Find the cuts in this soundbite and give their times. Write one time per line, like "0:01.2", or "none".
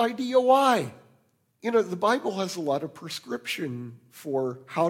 0:01.5

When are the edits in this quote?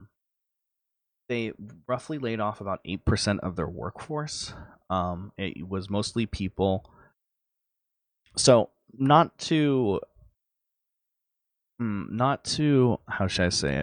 none

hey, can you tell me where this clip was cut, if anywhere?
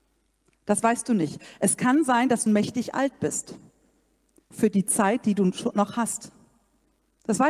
0:02.5

